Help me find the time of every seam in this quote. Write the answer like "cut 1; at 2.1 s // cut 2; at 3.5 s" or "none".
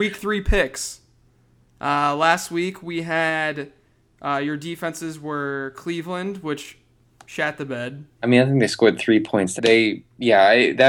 cut 1; at 8.2 s // cut 2; at 9.6 s